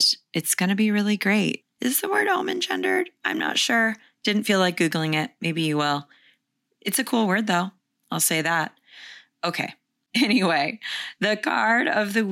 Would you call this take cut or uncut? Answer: cut